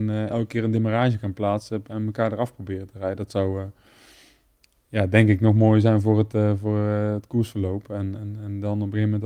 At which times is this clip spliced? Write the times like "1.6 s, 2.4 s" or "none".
8.2 s